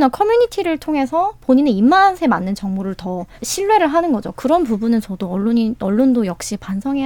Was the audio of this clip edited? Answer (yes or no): yes